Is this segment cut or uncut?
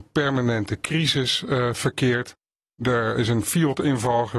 uncut